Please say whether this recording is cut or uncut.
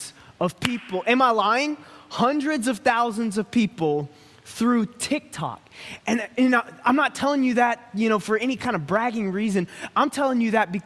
uncut